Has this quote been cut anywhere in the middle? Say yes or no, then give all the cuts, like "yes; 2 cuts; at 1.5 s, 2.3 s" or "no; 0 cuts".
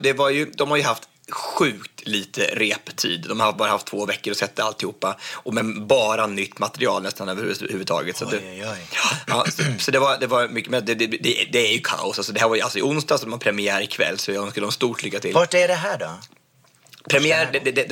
no; 0 cuts